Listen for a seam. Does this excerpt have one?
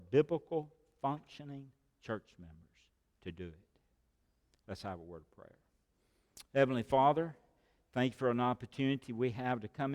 no; 0 cuts

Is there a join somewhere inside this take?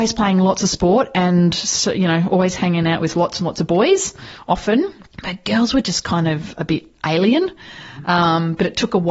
yes; 1 cut; at 5.1 s

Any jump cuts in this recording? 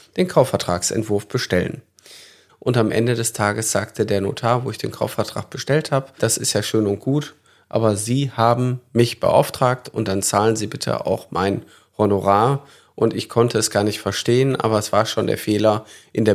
yes; 2 cuts; at 2.5 s, 6.2 s

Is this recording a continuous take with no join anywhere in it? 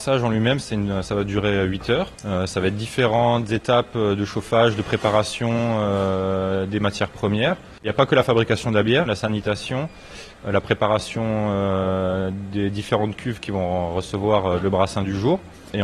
no; 2 cuts; at 2.1 s, 9.1 s

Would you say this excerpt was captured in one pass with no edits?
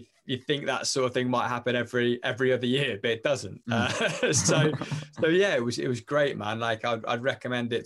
yes; 0 cuts

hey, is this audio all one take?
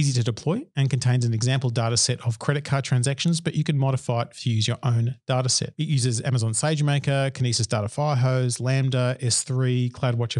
yes; 0 cuts

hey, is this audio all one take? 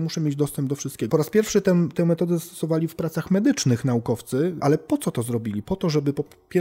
no; 2 cuts; at 1.1 s, 4.6 s

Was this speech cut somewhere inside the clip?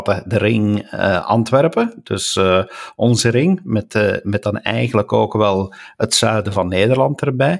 no; 0 cuts

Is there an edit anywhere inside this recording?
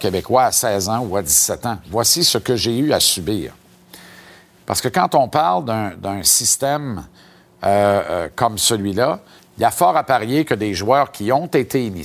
yes; 2 cuts; at 4.6 s, 9.4 s

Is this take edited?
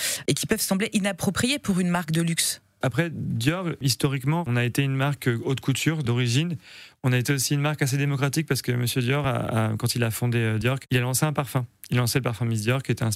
yes; 1 cut; at 2.8 s

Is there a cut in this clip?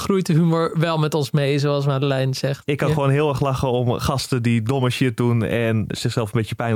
yes; 1 cut; at 2.7 s

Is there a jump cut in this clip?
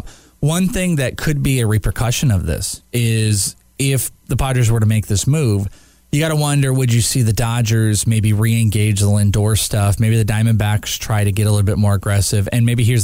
yes; 1 cut; at 2.8 s

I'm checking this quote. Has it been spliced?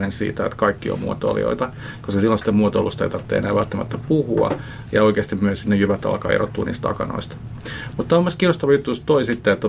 no; 0 cuts

